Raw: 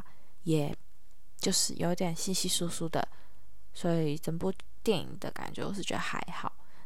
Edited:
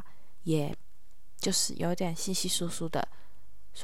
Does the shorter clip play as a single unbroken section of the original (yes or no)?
yes